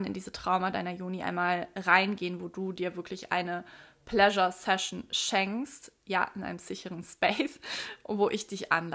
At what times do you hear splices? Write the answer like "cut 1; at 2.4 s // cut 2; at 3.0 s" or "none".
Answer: none

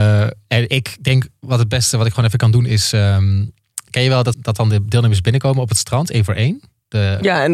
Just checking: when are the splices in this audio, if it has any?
cut 1; at 4.3 s

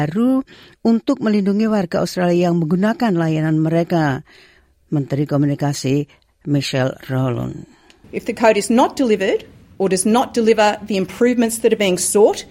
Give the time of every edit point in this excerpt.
none

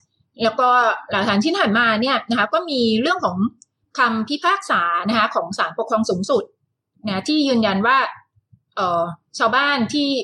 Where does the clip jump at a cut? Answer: none

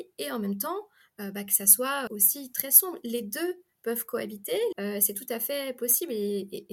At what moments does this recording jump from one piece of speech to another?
cut 1; at 2.1 s // cut 2; at 4.7 s

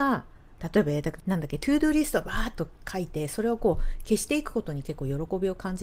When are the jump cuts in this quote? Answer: cut 1; at 1.2 s

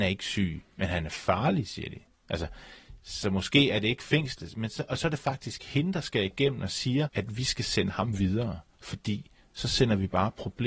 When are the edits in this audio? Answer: cut 1; at 7.1 s

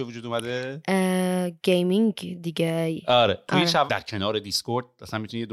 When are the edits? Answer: cut 1; at 3.9 s

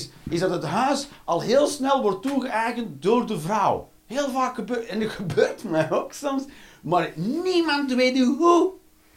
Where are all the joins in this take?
cut 1; at 4.0 s

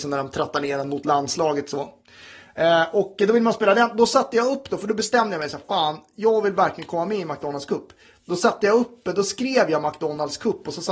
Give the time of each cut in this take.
none

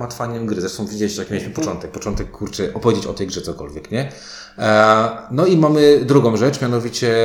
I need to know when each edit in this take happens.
none

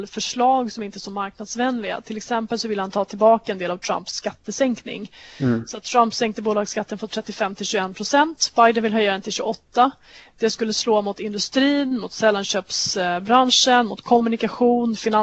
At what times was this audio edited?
none

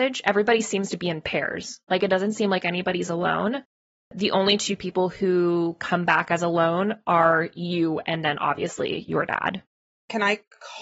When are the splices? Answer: none

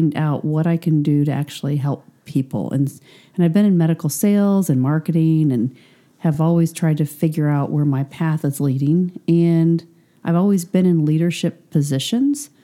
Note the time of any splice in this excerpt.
none

